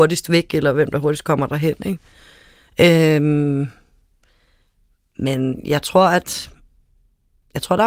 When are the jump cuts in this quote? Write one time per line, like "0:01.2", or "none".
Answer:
none